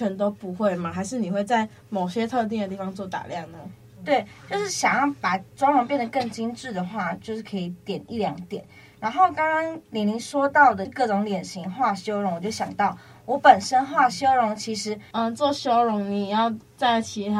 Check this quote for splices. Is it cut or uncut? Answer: cut